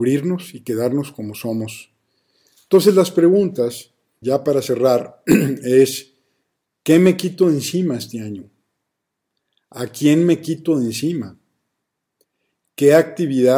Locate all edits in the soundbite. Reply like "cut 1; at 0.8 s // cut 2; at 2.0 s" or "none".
cut 1; at 4.2 s